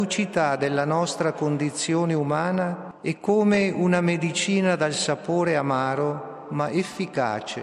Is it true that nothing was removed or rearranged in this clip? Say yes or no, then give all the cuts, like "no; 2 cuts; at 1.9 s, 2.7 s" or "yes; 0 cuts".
yes; 0 cuts